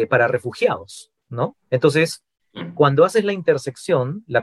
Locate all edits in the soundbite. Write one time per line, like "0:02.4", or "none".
none